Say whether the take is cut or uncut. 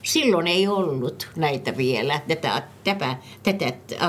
uncut